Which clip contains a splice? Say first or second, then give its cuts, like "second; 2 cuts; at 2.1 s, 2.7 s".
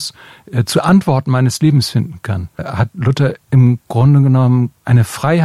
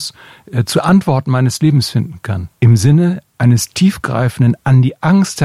second; 1 cut; at 2.5 s